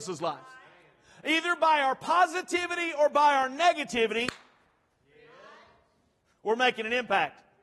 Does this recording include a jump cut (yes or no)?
no